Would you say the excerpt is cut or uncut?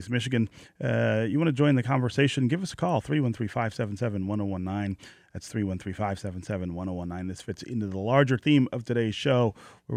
uncut